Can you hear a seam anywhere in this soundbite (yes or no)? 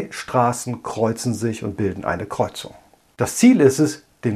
no